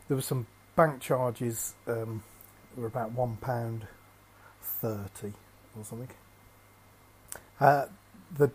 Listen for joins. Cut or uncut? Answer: cut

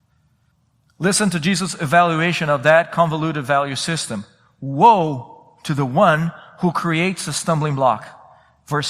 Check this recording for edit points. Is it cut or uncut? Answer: uncut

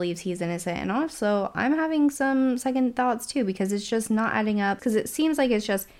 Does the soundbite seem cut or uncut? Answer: cut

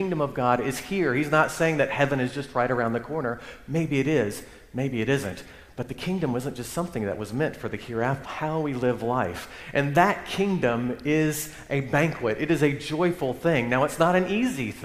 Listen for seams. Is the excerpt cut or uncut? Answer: cut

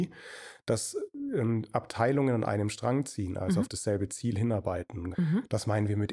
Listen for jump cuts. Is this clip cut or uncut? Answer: cut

